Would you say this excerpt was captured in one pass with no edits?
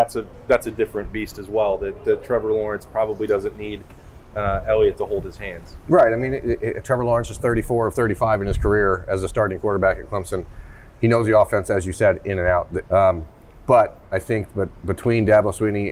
no; 1 cut; at 12.8 s

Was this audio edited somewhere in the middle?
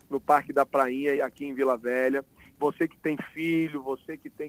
yes; 2 cuts; at 1.2 s, 2.6 s

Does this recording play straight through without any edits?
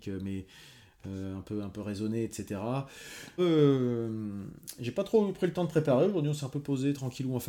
no; 1 cut; at 3.4 s

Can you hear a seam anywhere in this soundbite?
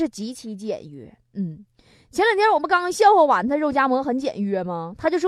no; 0 cuts

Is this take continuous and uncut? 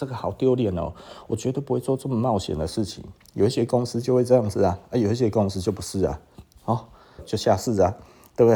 no; 1 cut; at 7.2 s

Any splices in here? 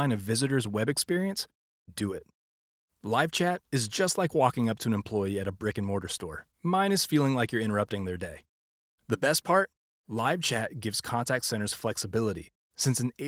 yes; 2 cuts; at 2.9 s, 6.5 s

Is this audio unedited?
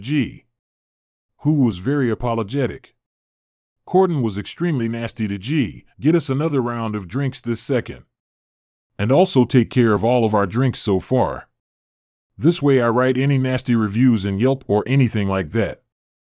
no; 1 cut; at 5.9 s

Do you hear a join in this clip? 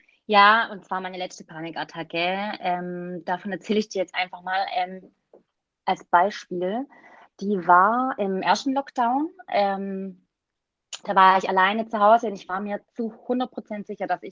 no; 0 cuts

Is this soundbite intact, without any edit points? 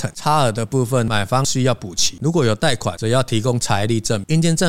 no; 1 cut; at 2.2 s

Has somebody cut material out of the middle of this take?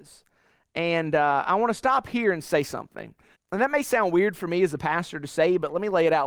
yes; 1 cut; at 3.3 s

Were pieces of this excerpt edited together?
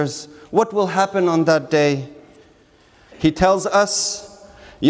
yes; 1 cut; at 3.1 s

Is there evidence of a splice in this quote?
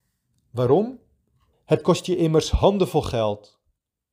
yes; 1 cut; at 1.5 s

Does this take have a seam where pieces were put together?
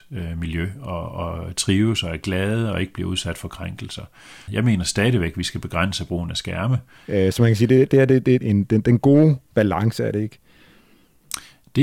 yes; 3 cuts; at 4.5 s, 7.0 s, 8.4 s

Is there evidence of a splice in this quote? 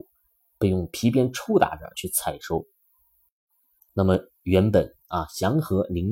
yes; 1 cut; at 1.9 s

